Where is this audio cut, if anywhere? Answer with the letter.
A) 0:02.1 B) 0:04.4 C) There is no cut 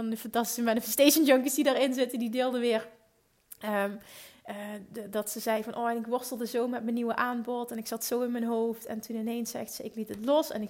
C